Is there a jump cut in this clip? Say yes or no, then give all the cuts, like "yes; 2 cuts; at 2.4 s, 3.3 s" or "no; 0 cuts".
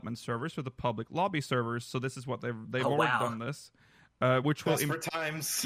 no; 0 cuts